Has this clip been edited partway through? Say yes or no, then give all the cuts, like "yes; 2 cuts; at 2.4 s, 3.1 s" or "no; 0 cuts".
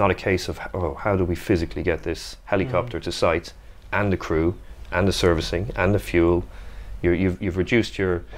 no; 0 cuts